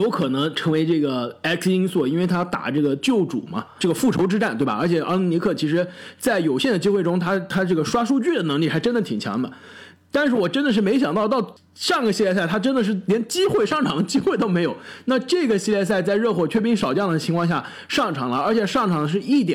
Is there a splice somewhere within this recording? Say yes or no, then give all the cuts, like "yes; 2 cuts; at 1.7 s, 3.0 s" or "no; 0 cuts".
no; 0 cuts